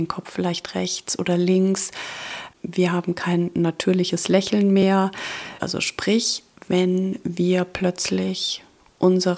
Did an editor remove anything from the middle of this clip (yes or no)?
yes